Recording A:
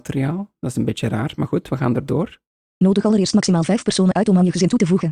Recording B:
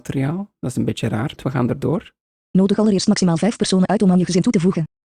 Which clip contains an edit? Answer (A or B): B